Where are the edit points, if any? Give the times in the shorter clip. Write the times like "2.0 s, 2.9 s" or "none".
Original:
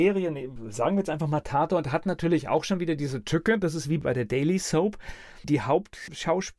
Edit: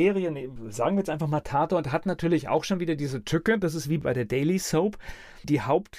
none